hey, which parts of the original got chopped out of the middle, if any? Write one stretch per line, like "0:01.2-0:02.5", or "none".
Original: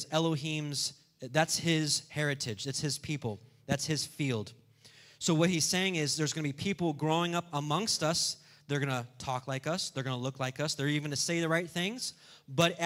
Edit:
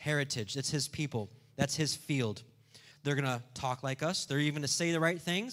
0:05.0-0:08.6
0:09.9-0:10.8